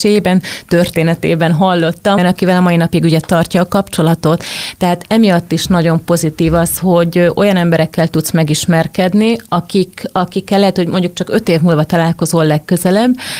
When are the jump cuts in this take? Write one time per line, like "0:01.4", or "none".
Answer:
0:02.2

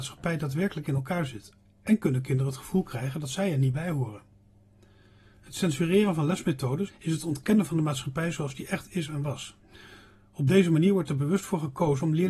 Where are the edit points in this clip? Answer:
0:06.9

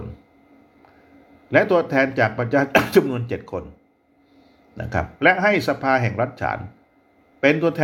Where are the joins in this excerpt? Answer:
none

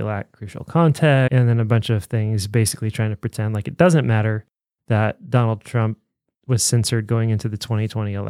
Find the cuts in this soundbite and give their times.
none

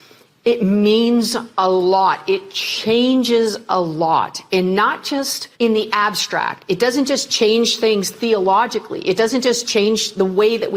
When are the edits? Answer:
0:05.5

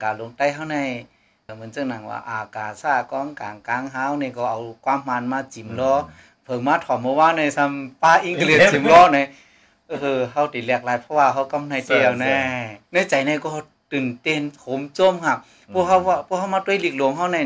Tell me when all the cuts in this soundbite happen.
0:01.5
0:12.9

